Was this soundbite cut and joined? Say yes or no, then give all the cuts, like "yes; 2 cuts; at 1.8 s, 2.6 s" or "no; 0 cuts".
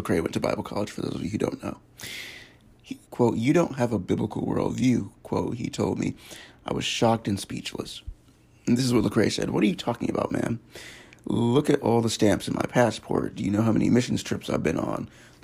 yes; 1 cut; at 3.0 s